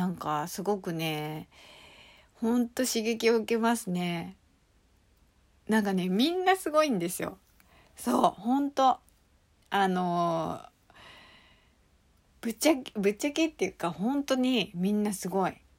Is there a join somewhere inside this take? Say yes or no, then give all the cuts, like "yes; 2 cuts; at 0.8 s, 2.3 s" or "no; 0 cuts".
no; 0 cuts